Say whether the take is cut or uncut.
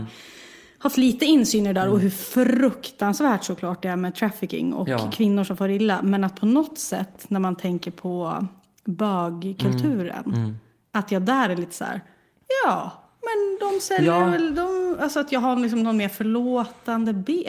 uncut